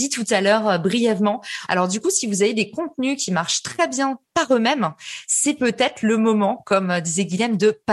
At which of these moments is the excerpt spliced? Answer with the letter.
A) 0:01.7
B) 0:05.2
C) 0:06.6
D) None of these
A